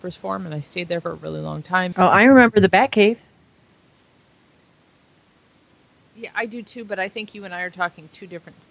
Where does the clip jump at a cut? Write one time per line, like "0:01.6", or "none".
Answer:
0:01.9